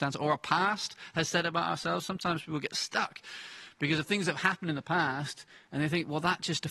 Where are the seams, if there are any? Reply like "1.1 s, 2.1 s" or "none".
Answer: none